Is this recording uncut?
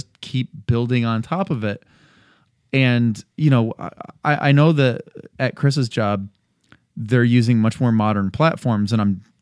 yes; 0 cuts

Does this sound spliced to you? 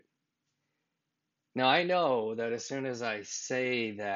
no; 0 cuts

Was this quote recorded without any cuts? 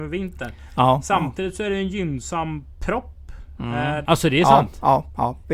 no; 1 cut; at 4.0 s

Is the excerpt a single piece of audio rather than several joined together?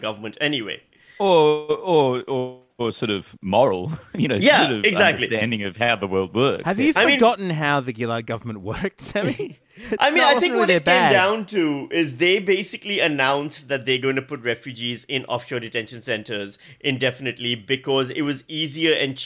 yes; 0 cuts

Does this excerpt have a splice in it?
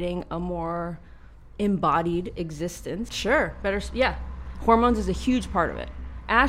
yes; 1 cut; at 3.1 s

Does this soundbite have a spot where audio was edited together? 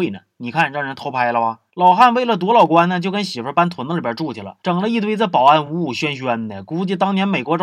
no; 0 cuts

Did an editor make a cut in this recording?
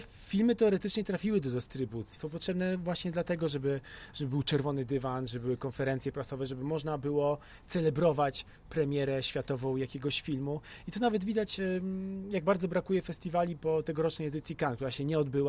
yes; 1 cut; at 2.2 s

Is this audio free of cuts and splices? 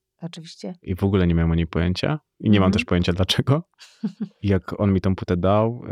yes; 0 cuts

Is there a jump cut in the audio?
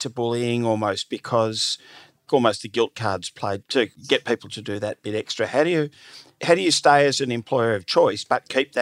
yes; 1 cut; at 2.3 s

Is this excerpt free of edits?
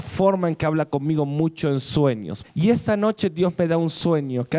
no; 1 cut; at 2.4 s

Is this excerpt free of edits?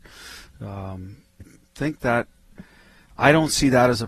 no; 1 cut; at 1.4 s

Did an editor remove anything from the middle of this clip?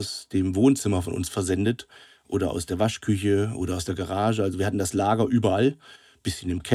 no; 0 cuts

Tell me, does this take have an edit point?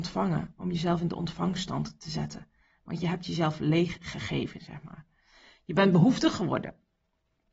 no; 0 cuts

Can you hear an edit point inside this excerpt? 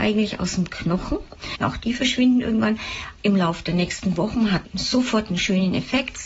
yes; 2 cuts; at 1.6 s, 3.1 s

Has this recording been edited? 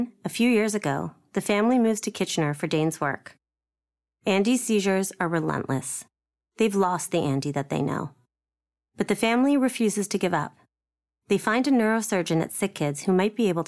no; 0 cuts

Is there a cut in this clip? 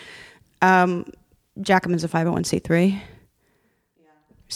no; 0 cuts

